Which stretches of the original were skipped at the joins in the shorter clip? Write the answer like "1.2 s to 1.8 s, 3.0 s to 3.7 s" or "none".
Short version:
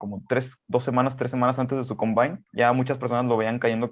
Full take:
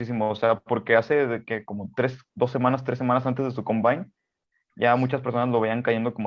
4.1 s to 4.7 s